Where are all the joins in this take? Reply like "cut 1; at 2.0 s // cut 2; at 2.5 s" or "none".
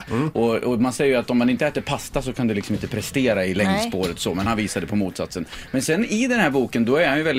none